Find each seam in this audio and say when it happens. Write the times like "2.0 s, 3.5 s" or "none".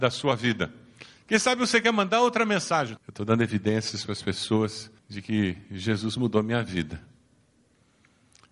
3.0 s, 5.0 s